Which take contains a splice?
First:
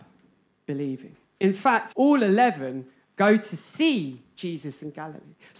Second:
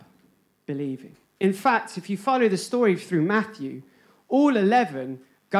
first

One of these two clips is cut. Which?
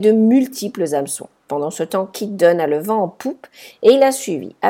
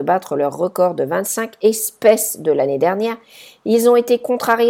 first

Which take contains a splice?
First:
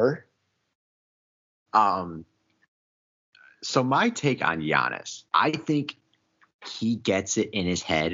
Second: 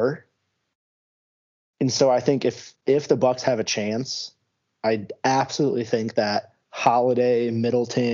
first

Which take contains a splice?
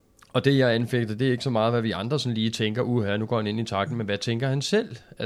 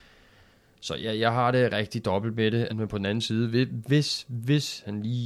second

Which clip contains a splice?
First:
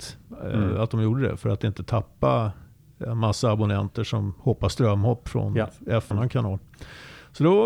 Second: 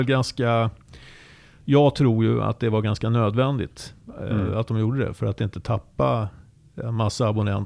first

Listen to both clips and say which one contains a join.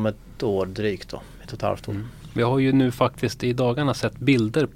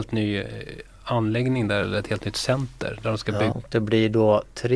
second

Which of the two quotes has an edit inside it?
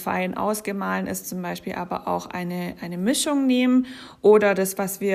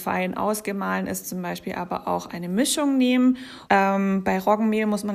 second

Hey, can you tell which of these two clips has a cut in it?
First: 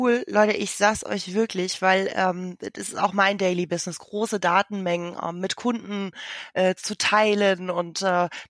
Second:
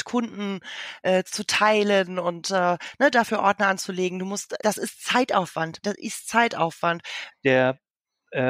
second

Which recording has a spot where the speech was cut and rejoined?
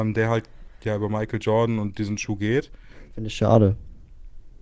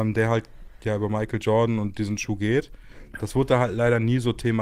first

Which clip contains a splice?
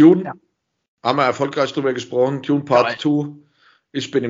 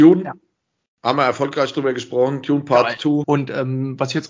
second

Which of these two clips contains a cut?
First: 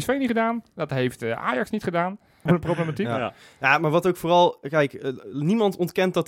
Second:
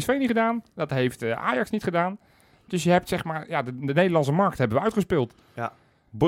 first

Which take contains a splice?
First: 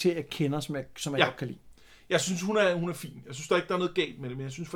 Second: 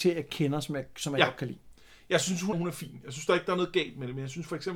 second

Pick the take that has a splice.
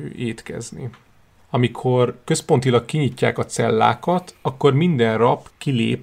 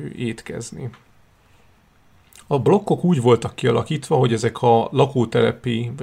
first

